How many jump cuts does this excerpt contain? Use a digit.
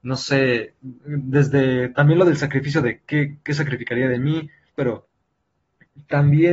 1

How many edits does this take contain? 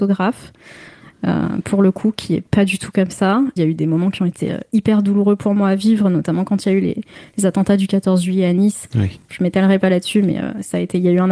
2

